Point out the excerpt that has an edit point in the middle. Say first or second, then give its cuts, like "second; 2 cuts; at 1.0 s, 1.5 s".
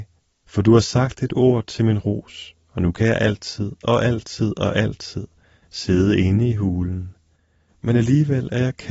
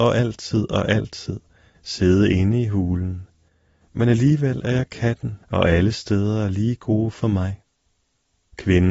second; 1 cut; at 5.4 s